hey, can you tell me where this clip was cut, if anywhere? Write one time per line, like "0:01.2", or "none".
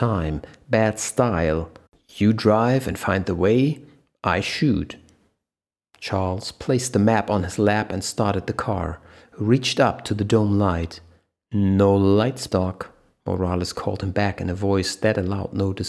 0:12.5